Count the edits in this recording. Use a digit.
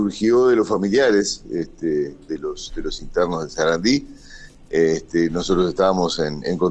0